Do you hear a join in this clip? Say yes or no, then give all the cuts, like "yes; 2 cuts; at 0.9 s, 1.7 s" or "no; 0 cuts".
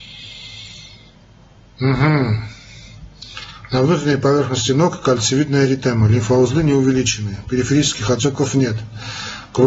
no; 0 cuts